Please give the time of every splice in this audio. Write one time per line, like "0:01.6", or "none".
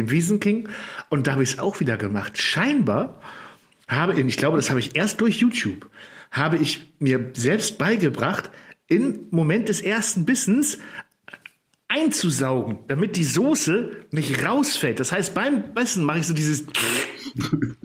none